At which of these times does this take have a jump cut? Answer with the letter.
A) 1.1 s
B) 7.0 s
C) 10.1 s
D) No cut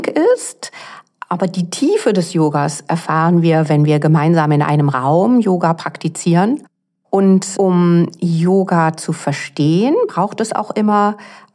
D